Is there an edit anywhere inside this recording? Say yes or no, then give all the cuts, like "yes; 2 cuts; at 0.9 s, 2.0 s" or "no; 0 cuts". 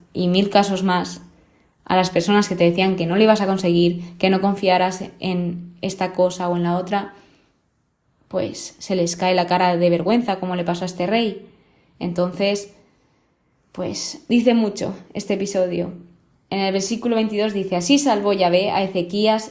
no; 0 cuts